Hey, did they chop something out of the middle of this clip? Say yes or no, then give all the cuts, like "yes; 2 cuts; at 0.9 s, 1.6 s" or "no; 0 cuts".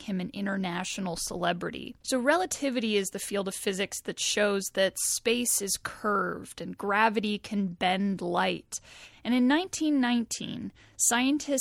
yes; 2 cuts; at 2.0 s, 9.1 s